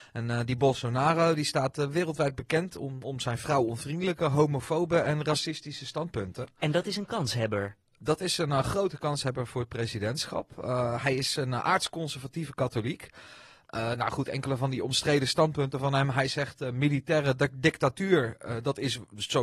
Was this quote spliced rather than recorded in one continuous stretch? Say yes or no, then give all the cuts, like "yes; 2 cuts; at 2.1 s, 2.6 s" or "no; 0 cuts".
no; 0 cuts